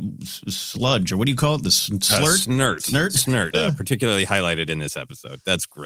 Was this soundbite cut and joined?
yes; 1 cut; at 3.5 s

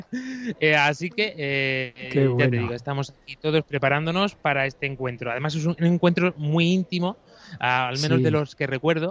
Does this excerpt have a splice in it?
no; 0 cuts

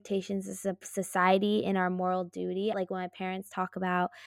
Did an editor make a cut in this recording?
yes; 1 cut; at 2.7 s

